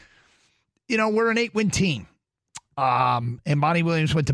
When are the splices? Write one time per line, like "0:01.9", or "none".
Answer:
none